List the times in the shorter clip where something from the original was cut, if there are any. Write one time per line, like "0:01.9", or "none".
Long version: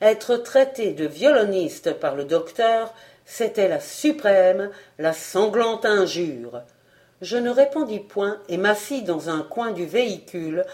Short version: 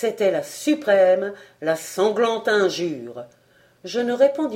none